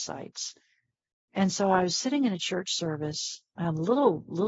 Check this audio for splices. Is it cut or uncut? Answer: uncut